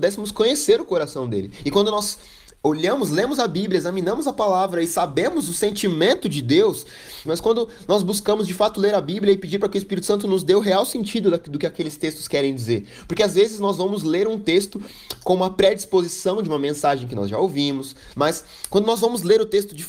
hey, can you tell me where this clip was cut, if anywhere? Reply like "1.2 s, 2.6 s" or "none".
7.3 s, 18.1 s